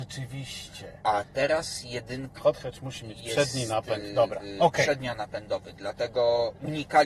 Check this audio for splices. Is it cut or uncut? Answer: cut